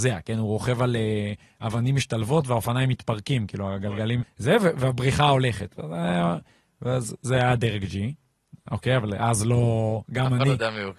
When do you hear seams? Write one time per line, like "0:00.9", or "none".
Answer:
0:04.2